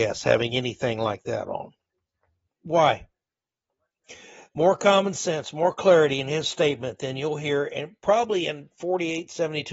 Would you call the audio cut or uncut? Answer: cut